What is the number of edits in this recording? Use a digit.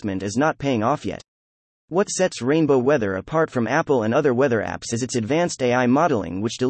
1